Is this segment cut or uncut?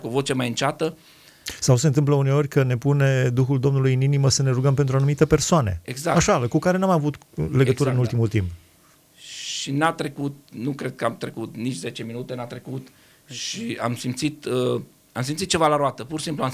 uncut